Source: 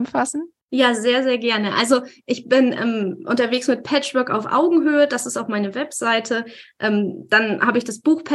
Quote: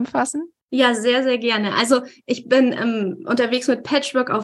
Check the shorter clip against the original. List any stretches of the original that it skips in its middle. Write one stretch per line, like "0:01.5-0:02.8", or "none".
none